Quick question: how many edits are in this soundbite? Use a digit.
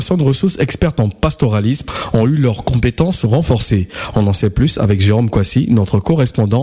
0